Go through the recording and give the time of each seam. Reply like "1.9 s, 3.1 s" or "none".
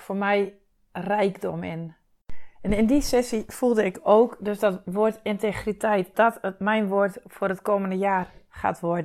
6.1 s